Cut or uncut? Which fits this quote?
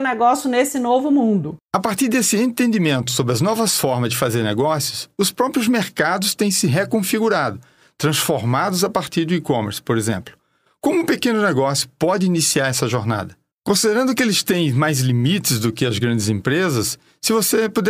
uncut